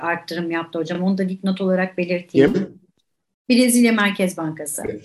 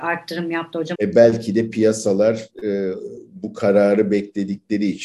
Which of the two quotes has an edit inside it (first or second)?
second